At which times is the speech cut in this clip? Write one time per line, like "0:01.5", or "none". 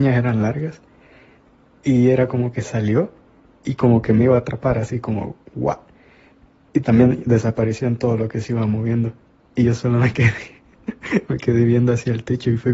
none